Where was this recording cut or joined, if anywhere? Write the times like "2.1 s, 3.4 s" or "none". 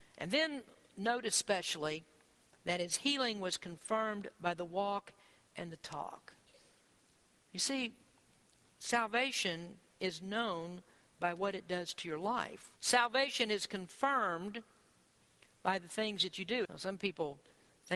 12.8 s, 16.6 s

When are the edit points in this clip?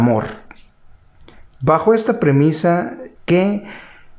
3.2 s

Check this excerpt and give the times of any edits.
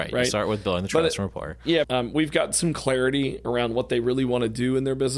1.8 s

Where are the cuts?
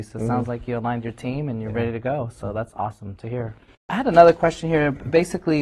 none

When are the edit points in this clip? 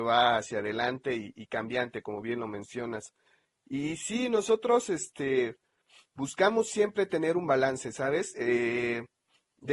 none

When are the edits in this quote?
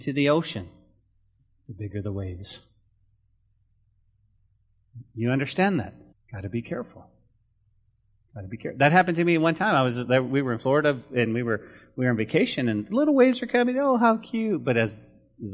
6.1 s

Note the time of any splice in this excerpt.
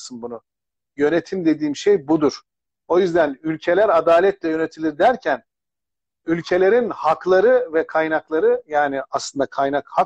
none

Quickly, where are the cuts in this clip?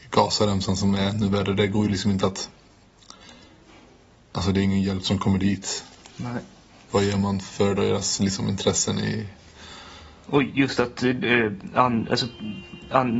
6.9 s

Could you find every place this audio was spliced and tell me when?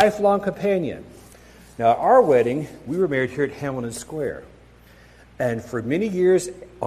none

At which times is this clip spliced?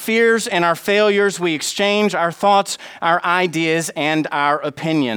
none

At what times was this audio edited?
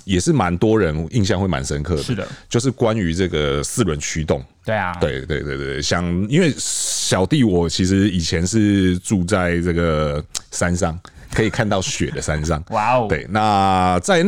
none

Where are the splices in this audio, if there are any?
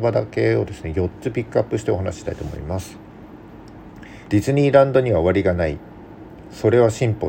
4.3 s

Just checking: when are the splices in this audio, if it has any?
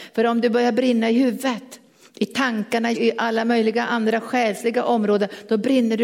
2.9 s

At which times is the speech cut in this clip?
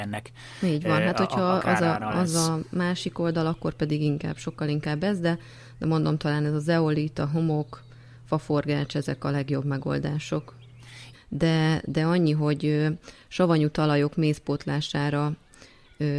11.1 s

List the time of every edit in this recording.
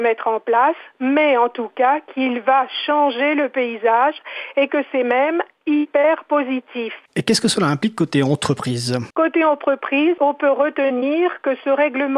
9.1 s

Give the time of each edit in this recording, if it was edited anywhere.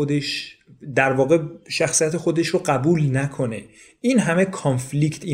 none

